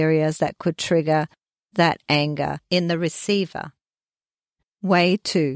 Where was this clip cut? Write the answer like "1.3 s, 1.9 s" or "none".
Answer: 4.6 s

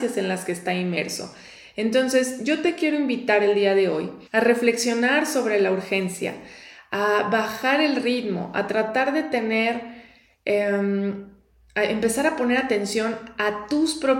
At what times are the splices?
4.3 s

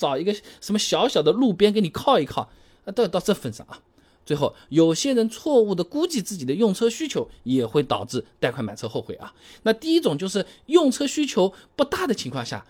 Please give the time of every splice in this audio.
none

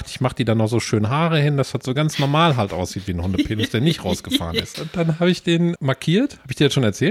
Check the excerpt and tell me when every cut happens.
4.7 s, 5.8 s

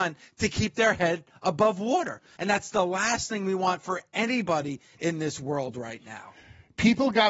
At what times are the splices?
2.4 s

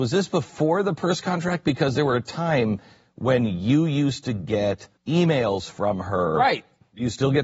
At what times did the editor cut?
5.0 s

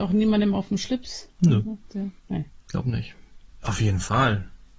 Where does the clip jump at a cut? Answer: 2.2 s, 3.6 s

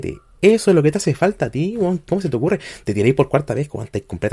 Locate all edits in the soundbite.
2.1 s

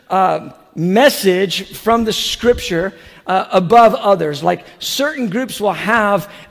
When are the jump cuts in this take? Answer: none

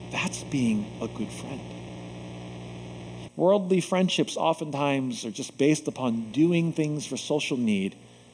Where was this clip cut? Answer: 3.3 s

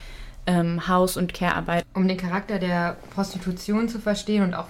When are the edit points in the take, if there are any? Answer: 1.8 s

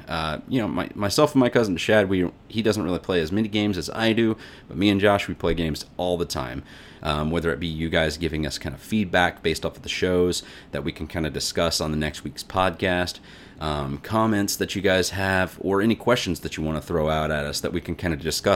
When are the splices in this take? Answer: 7.0 s

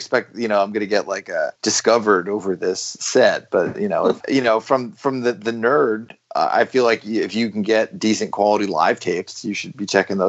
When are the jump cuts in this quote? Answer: 1.6 s, 4.2 s

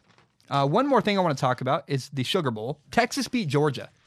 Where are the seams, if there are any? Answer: 2.8 s

